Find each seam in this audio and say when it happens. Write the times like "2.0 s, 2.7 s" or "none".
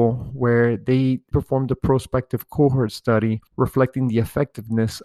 1.3 s, 3.5 s